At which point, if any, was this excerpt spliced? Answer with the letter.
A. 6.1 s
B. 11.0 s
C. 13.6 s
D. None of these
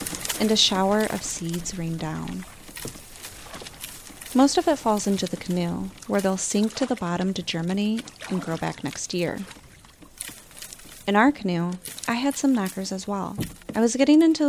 A